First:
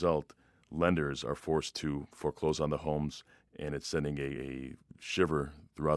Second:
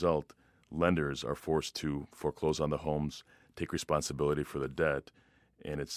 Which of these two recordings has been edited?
first; 1 cut; at 3.4 s

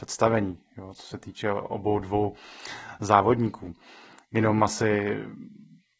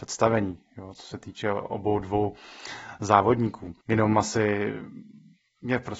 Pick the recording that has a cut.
second; 1 cut; at 3.8 s

